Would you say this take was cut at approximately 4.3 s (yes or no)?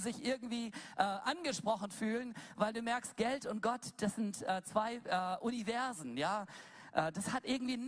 no